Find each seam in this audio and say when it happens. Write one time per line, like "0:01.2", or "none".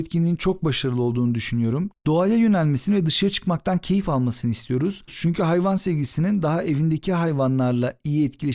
0:01.9
0:05.1